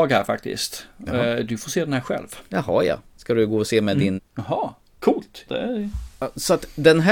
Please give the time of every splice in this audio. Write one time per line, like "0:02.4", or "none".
0:04.2
0:05.5